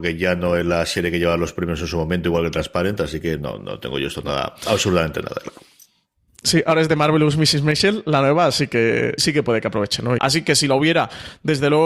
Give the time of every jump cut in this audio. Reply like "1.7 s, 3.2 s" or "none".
9.2 s, 10.2 s